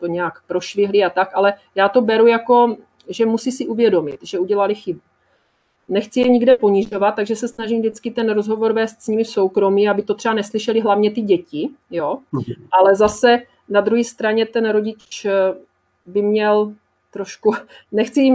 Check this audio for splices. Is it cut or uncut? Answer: uncut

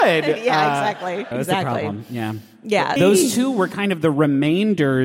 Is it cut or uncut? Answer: cut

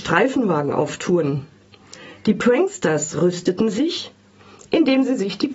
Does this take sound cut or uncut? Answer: uncut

